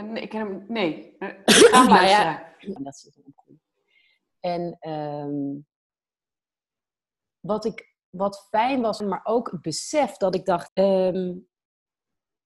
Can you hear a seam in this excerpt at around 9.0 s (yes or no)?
yes